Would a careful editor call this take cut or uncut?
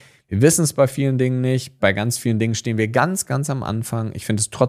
cut